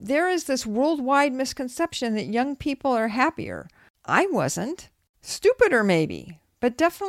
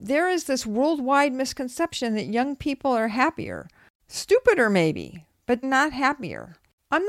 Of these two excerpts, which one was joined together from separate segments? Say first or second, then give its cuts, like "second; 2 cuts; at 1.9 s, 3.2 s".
second; 2 cuts; at 3.9 s, 5.6 s